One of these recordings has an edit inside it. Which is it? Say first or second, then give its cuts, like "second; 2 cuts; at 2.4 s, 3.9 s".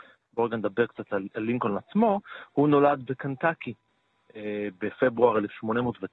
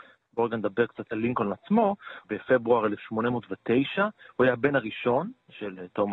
second; 2 cuts; at 1.1 s, 2.2 s